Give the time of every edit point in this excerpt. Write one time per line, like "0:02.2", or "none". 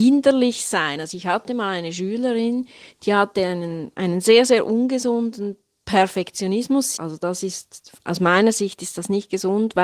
0:07.0